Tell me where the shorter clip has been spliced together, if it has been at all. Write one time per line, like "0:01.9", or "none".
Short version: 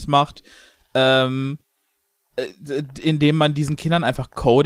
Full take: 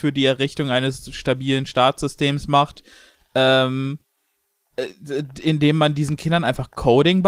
none